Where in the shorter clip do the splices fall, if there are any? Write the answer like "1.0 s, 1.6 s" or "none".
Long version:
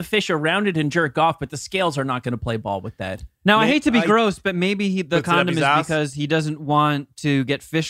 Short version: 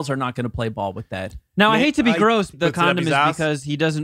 2.5 s